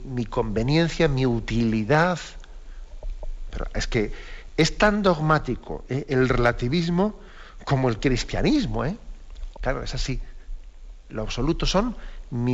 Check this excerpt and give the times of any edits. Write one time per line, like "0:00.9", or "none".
0:09.5